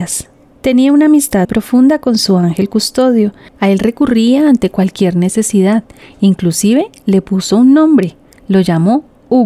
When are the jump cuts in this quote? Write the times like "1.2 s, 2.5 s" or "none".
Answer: 1.4 s